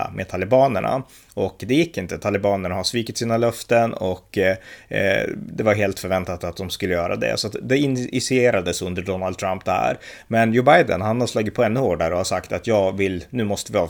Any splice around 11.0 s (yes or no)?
no